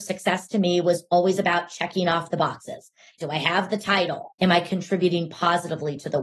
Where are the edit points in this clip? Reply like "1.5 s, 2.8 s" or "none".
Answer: 3.2 s, 4.3 s

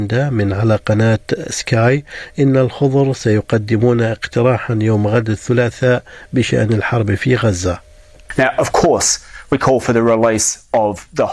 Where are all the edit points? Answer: none

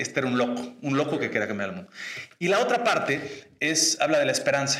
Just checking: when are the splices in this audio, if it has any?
none

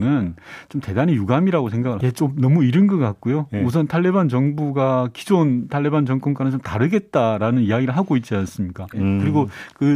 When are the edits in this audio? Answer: 2.0 s, 8.9 s

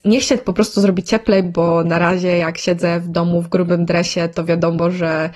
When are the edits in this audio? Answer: none

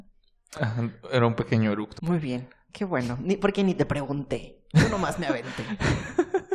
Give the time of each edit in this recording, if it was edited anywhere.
2.0 s

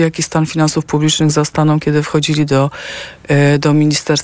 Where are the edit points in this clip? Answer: none

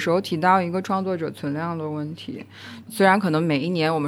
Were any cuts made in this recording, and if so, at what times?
2.9 s

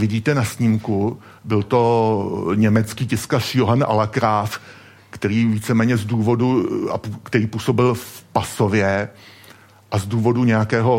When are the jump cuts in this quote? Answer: 1.4 s

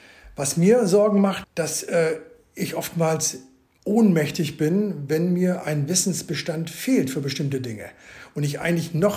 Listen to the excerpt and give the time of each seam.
1.4 s

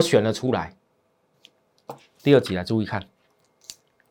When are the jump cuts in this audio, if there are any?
2.2 s

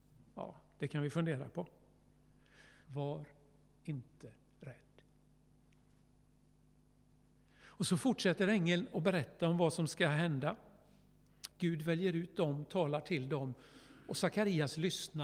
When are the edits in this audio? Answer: 2.8 s, 11.5 s

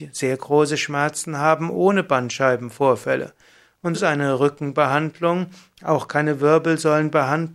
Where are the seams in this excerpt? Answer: 3.9 s

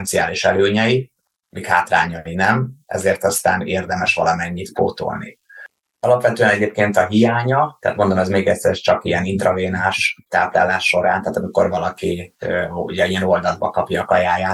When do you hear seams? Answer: 5.8 s

